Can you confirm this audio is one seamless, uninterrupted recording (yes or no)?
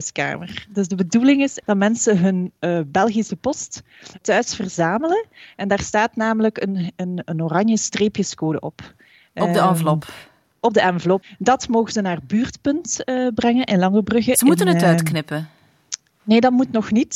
yes